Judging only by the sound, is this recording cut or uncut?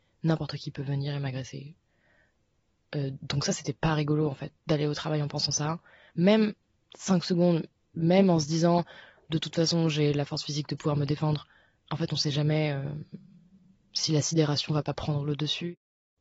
uncut